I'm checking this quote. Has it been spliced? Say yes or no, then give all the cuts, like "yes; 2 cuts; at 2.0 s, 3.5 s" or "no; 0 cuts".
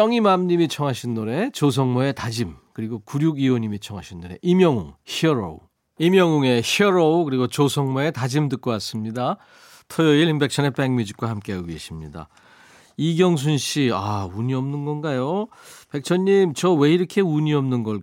no; 0 cuts